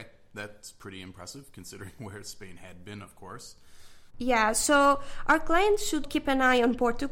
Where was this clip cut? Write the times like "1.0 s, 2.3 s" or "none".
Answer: 4.1 s, 6.0 s